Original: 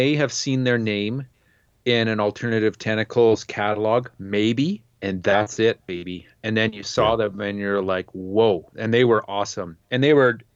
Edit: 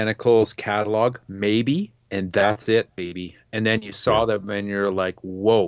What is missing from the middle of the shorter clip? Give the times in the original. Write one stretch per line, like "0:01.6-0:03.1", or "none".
none